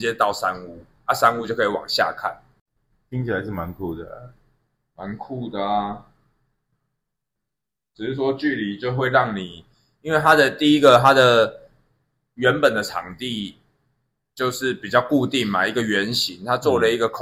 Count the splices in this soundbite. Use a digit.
0